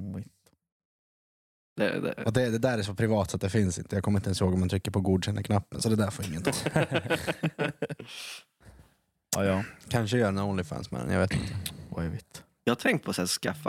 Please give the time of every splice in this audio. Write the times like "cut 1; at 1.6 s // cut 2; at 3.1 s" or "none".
none

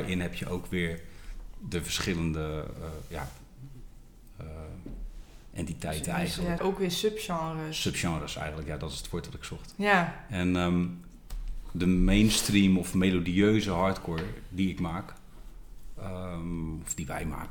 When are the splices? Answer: cut 1; at 6.6 s

